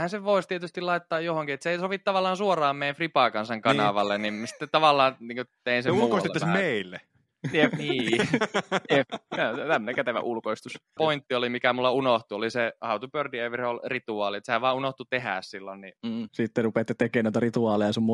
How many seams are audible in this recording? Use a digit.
2